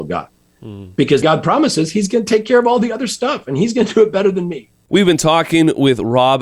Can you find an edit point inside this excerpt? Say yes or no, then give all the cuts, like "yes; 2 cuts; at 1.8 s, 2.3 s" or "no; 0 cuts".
yes; 1 cut; at 1.2 s